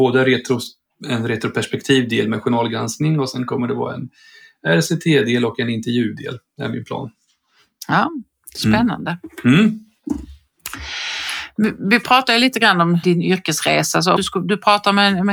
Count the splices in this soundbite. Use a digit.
2